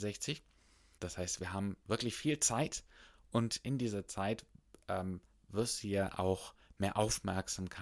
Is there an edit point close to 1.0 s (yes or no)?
yes